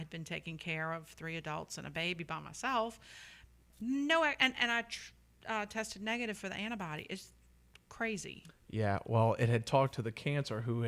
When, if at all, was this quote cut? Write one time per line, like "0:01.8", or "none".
0:03.7